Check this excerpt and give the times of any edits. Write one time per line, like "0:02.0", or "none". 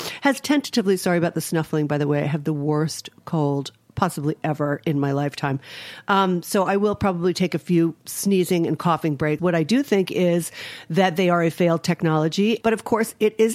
0:09.4
0:12.6